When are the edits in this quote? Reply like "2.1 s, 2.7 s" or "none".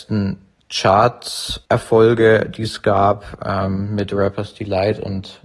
none